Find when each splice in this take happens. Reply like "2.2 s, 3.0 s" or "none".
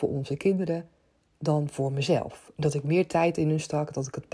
none